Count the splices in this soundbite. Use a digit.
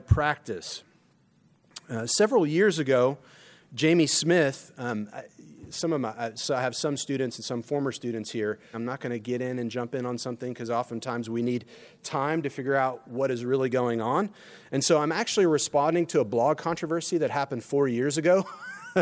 1